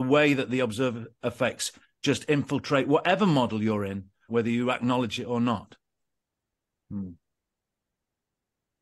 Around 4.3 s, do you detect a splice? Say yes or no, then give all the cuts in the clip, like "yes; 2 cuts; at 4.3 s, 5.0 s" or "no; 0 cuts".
yes; 1 cut; at 4.3 s